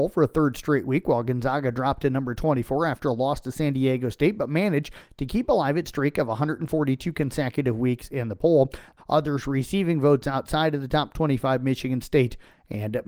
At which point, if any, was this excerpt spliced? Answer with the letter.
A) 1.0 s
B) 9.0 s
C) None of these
B